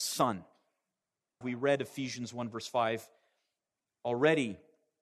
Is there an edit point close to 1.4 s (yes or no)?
yes